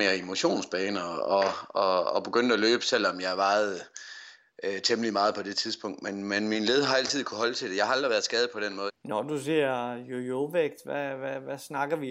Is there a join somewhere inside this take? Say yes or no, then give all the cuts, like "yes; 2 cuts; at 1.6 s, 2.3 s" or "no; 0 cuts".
yes; 1 cut; at 8.9 s